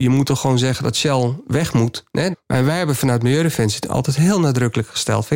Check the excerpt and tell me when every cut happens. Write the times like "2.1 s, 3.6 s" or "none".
2.3 s